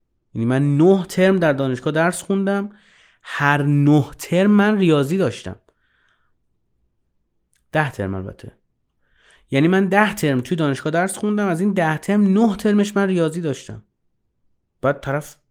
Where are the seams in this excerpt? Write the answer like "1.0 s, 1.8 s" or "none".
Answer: none